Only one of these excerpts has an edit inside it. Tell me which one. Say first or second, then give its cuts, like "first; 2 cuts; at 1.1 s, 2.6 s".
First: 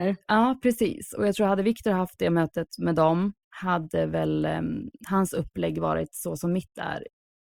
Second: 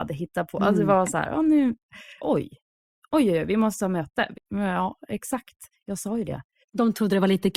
second; 2 cuts; at 2.2 s, 4.3 s